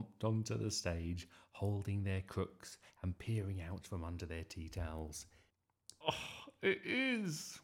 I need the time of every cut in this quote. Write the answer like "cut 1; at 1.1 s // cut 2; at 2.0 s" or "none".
cut 1; at 6.0 s